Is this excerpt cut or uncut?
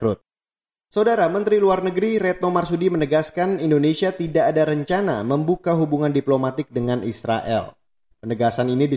uncut